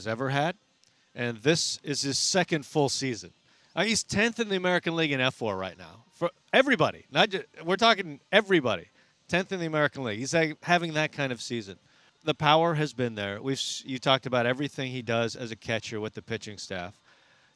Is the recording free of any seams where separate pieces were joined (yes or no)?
yes